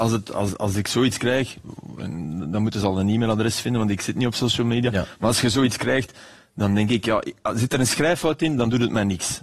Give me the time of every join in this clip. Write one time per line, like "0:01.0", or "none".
none

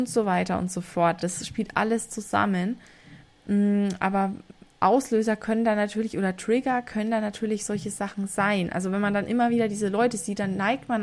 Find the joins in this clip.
none

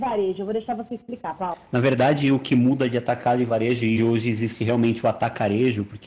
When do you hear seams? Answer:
0:04.0

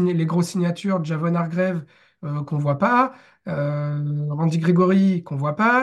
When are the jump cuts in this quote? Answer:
none

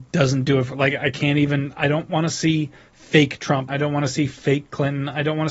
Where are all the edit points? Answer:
0:03.7

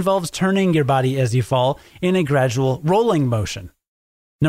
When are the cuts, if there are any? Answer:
none

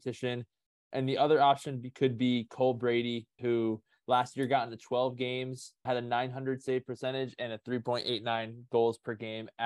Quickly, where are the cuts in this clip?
0:03.4
0:05.9

